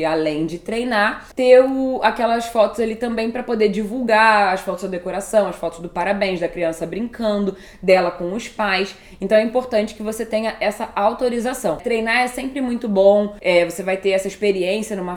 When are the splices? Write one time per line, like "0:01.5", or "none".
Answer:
0:11.8